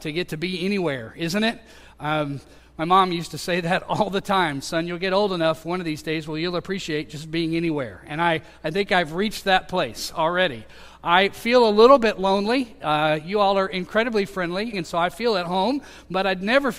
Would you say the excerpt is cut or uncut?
cut